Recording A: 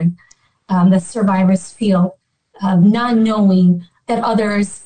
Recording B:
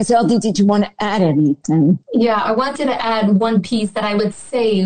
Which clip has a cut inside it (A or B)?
B